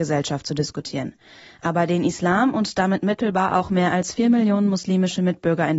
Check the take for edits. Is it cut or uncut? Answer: uncut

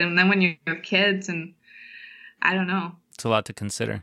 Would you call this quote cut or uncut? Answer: cut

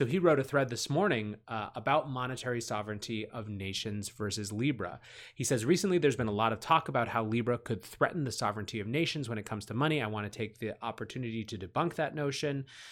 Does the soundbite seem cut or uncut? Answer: uncut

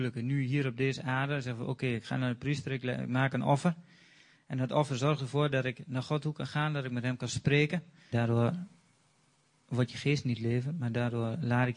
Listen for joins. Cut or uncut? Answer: cut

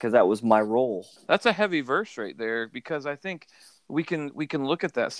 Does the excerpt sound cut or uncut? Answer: cut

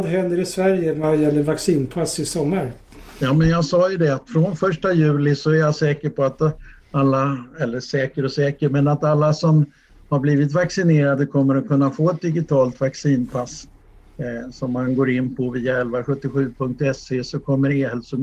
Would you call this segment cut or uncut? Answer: uncut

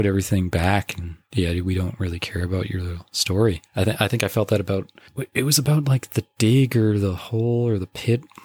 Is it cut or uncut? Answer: uncut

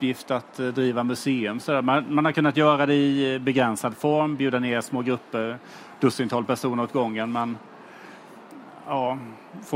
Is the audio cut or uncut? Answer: uncut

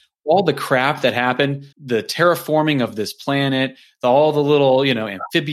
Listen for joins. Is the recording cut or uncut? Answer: cut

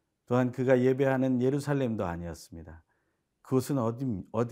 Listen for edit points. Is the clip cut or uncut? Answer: uncut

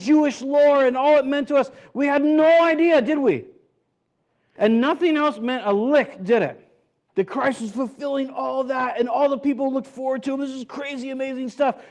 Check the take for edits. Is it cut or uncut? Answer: cut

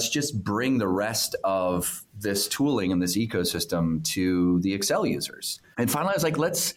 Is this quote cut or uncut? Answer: cut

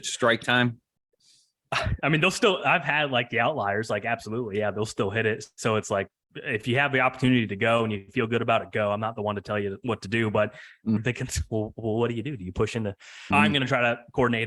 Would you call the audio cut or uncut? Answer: cut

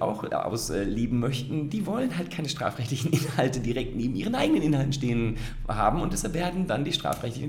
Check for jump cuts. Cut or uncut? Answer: uncut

